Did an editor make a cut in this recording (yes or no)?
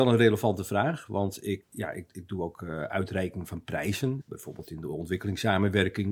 yes